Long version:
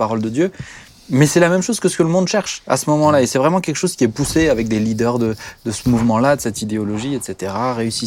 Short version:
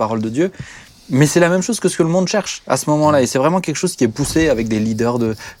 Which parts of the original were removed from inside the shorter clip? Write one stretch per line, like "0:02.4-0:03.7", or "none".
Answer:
none